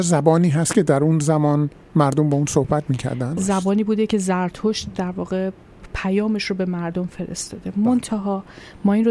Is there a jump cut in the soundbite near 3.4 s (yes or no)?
yes